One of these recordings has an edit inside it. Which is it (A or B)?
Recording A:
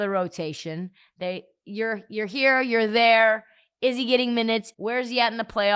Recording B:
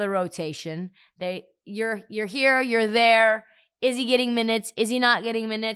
A